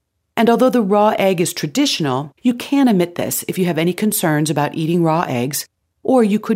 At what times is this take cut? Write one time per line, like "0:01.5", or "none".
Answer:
0:02.4